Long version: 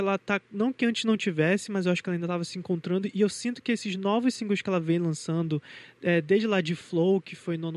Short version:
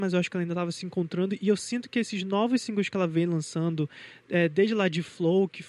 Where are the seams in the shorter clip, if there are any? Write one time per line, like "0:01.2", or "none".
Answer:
none